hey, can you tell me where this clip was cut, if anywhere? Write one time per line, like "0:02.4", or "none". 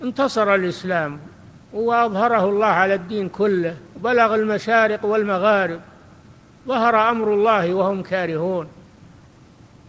0:01.6